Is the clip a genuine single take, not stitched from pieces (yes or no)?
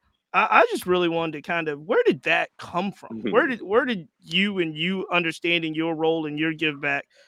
yes